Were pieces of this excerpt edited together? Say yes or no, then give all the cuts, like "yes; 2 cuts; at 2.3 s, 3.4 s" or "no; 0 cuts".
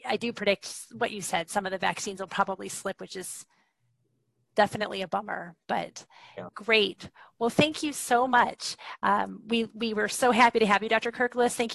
yes; 1 cut; at 6.5 s